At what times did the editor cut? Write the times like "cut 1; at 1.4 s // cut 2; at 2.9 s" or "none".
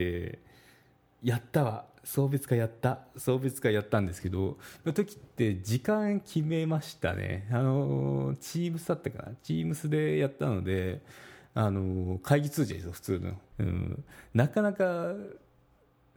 cut 1; at 13.5 s